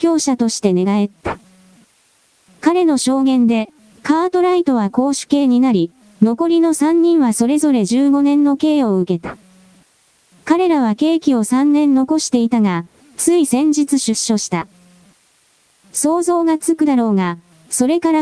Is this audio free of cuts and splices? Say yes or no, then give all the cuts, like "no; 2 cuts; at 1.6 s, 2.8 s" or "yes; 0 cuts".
yes; 0 cuts